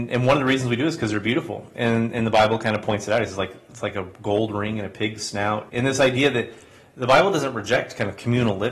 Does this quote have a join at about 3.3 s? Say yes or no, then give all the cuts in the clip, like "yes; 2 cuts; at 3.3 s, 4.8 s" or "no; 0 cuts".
no; 1 cut; at 5.7 s